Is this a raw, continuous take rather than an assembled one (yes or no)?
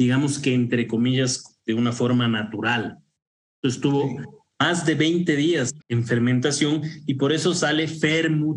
no